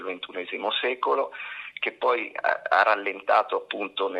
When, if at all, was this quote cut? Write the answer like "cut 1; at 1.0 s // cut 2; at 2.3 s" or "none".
none